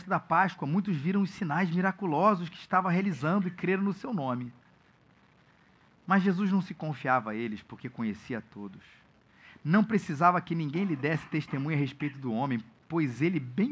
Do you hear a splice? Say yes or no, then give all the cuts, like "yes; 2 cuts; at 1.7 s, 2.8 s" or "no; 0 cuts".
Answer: no; 0 cuts